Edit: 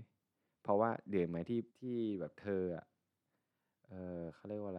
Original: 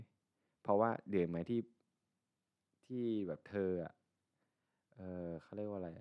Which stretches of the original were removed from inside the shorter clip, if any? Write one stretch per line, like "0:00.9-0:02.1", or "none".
0:01.7-0:02.8